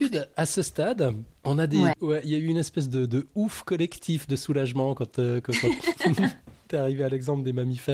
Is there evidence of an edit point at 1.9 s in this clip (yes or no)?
yes